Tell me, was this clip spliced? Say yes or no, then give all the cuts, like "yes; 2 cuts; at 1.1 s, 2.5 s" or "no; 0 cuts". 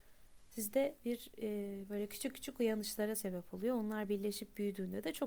no; 0 cuts